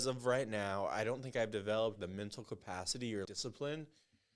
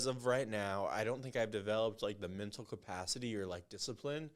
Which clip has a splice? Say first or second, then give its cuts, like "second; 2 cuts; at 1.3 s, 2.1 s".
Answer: first; 2 cuts; at 2.0 s, 3.2 s